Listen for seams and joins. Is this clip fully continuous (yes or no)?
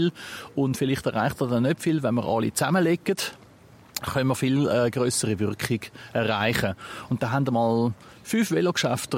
yes